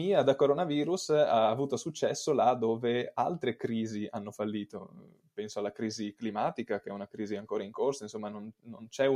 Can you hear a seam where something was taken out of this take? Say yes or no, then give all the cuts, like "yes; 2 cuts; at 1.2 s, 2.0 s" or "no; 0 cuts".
no; 0 cuts